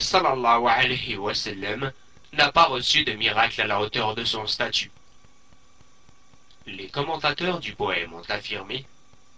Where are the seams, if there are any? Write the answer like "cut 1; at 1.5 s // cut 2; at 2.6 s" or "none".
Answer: none